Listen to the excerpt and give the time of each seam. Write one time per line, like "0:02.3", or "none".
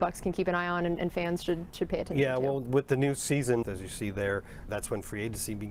0:03.6
0:04.7